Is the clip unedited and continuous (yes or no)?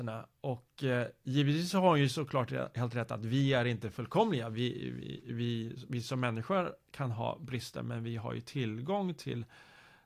yes